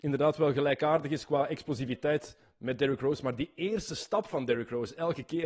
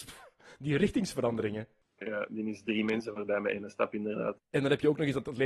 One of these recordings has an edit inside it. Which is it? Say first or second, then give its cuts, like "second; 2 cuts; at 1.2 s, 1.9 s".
second; 1 cut; at 4.4 s